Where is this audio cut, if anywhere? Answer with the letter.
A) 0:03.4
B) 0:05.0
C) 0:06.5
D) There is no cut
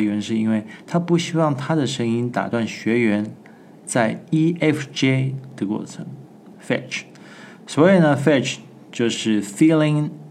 D